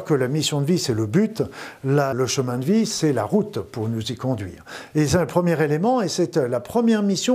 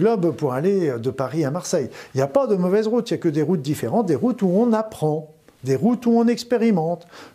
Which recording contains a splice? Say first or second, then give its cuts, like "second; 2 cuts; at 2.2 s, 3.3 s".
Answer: first; 2 cuts; at 2.1 s, 4.9 s